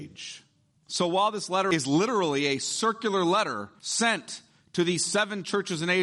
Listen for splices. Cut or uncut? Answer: uncut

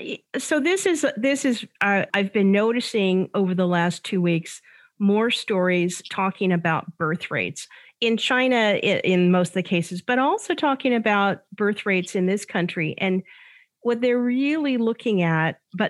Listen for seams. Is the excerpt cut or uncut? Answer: cut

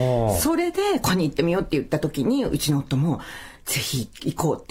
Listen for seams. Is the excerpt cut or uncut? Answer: cut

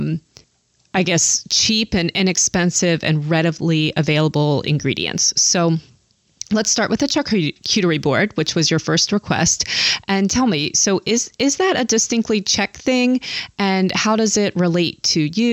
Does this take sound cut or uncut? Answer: uncut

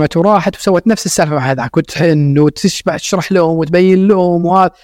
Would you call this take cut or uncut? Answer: uncut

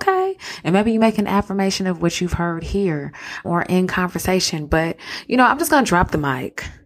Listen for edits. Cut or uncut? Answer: cut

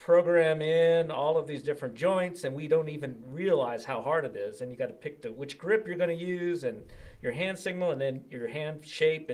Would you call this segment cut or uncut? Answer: uncut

